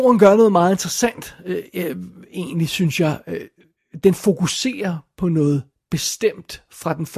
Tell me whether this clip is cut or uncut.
uncut